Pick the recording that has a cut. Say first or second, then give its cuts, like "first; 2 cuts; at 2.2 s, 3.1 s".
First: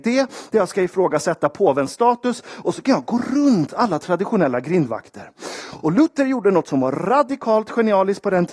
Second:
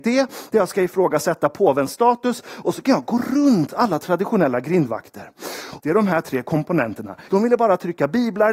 second; 2 cuts; at 5.8 s, 7.3 s